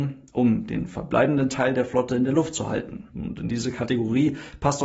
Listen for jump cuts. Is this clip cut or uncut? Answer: cut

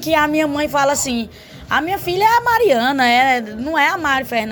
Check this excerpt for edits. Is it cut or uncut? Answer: uncut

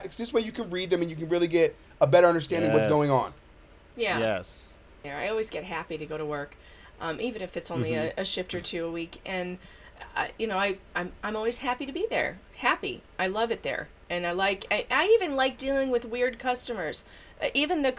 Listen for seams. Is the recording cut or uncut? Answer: uncut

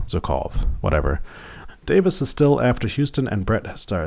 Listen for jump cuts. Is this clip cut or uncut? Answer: cut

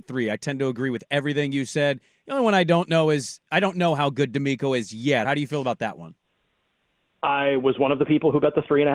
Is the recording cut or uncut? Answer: cut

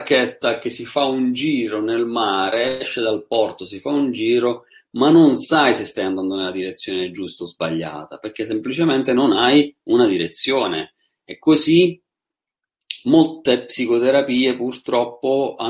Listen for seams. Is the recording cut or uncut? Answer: uncut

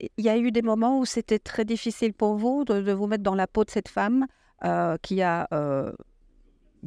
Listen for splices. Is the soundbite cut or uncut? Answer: uncut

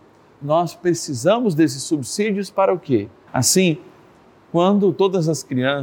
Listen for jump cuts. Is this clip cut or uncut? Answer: cut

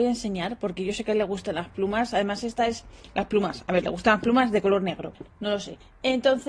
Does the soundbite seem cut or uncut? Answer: cut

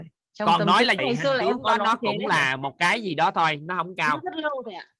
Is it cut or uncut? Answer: cut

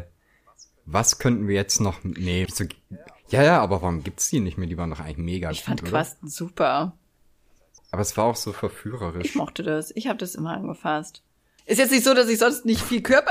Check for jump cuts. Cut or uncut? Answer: cut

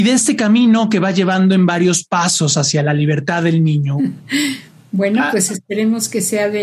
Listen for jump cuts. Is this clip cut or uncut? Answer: cut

